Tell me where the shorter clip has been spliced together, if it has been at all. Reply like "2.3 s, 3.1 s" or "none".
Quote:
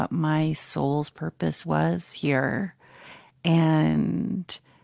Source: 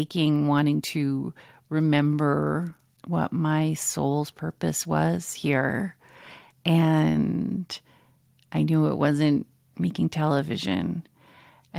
none